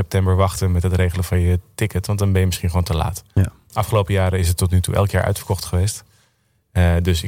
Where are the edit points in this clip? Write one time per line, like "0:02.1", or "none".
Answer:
none